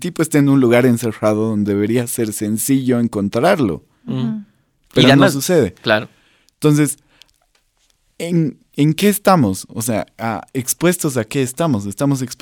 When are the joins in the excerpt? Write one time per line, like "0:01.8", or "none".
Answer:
none

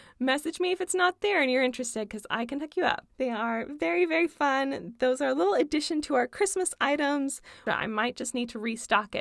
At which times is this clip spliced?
0:03.1
0:07.7

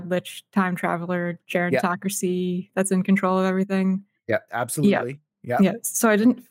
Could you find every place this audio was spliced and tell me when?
0:04.5

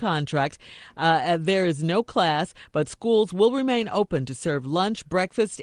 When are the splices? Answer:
none

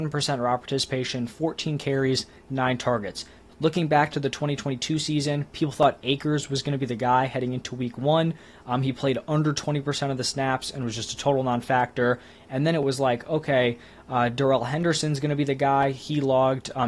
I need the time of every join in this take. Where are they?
0:03.5

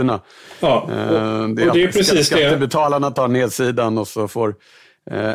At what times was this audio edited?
none

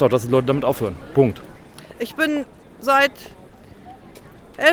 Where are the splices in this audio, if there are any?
none

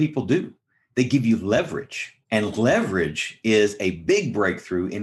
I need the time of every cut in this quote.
0:02.2

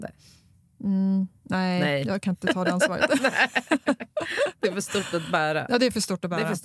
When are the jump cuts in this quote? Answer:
none

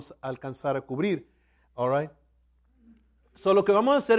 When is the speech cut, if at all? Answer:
0:01.6

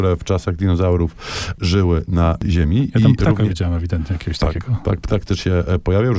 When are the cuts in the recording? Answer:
none

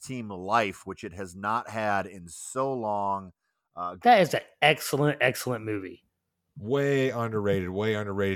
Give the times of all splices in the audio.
0:04.0

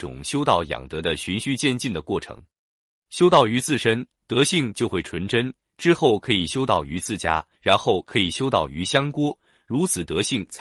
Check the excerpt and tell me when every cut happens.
0:07.5

